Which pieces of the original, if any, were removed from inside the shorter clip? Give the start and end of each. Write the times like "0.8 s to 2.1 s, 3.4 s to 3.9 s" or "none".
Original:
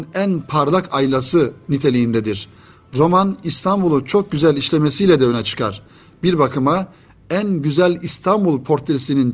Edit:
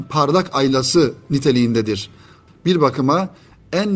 2.9 s to 6.1 s